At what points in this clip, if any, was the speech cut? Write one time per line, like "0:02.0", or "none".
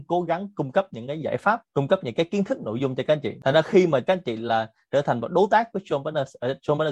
none